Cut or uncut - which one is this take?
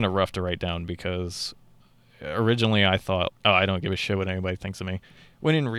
cut